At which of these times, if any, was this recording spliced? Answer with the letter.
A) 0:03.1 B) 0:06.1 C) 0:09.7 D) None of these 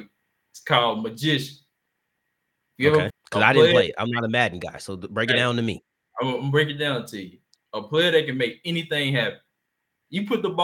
A